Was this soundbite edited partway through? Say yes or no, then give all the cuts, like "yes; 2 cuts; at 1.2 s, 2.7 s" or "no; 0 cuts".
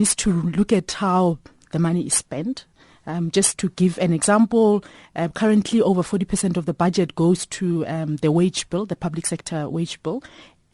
no; 0 cuts